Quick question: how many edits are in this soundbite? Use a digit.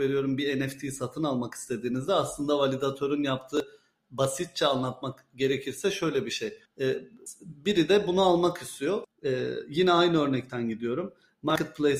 2